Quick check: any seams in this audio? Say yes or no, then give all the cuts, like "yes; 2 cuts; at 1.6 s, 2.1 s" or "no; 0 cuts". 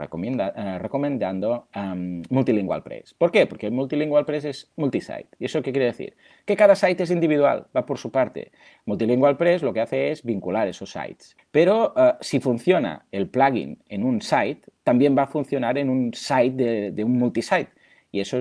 yes; 1 cut; at 11.4 s